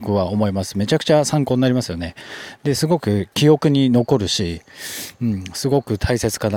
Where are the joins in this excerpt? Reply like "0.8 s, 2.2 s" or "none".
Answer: none